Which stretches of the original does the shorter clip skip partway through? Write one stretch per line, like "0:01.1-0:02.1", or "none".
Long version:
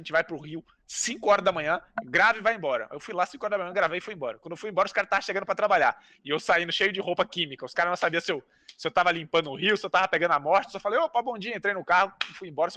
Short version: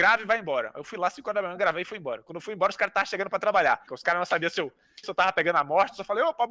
0:06.0-0:07.6
0:08.7-0:09.8